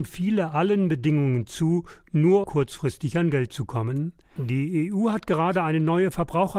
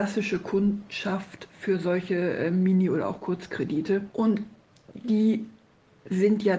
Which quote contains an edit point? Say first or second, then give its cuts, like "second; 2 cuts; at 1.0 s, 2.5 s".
first; 2 cuts; at 2.4 s, 4.4 s